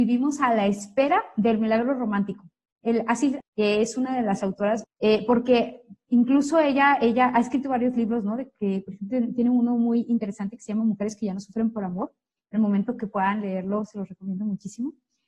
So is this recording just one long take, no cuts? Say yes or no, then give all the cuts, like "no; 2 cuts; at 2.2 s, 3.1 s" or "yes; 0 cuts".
no; 2 cuts; at 3.4 s, 4.8 s